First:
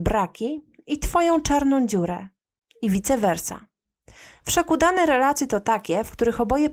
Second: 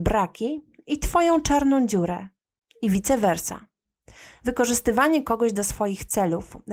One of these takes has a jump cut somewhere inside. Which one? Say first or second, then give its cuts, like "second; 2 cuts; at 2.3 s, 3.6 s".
first; 1 cut; at 4.4 s